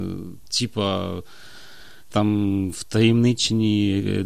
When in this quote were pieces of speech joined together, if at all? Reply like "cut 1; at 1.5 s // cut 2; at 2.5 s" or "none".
cut 1; at 2.1 s